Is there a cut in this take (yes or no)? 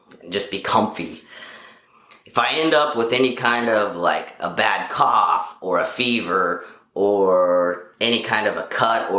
no